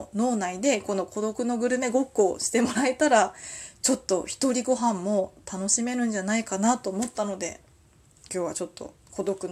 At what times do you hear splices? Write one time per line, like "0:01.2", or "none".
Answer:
none